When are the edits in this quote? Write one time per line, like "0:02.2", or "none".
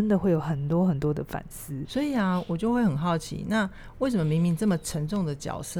0:01.8